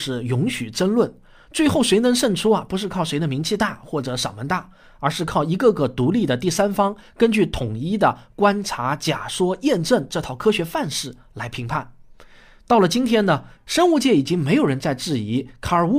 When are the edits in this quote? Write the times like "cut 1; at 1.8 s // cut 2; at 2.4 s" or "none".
none